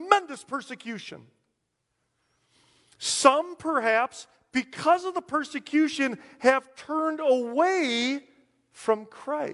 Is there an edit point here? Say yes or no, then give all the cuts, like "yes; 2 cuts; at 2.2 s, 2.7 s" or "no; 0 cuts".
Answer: no; 0 cuts